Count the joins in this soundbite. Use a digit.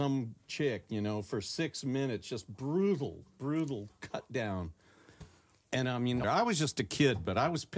1